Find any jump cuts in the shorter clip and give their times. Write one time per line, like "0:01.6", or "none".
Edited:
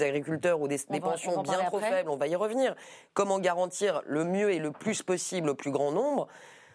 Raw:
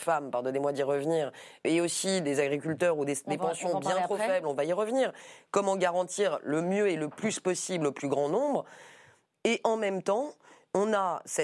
none

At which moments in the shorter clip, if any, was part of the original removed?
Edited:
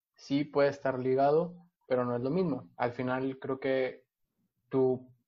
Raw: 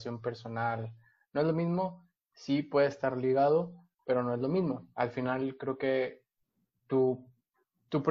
none

